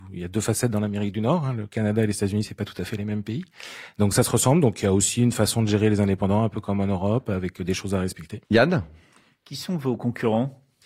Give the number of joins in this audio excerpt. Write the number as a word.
one